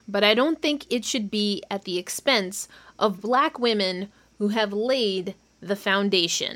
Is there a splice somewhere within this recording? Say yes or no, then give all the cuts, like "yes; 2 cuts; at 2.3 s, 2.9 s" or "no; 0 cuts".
no; 0 cuts